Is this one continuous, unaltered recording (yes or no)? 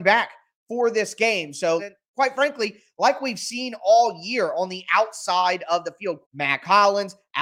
no